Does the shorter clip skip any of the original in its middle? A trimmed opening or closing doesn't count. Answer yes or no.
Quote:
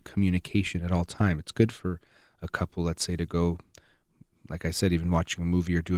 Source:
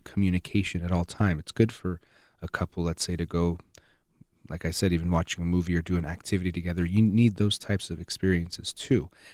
no